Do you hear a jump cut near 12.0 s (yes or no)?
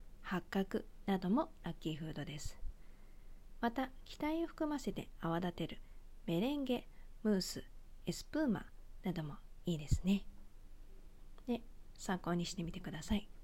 yes